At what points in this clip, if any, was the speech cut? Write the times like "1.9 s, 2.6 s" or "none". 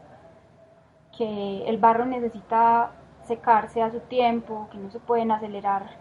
none